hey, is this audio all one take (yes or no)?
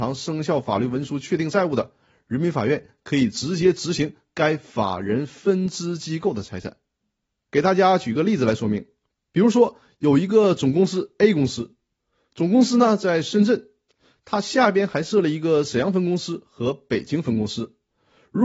yes